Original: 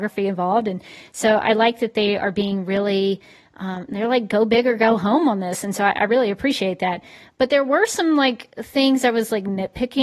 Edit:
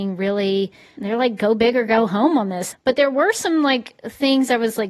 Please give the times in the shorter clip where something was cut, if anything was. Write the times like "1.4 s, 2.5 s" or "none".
1.0 s, 2.7 s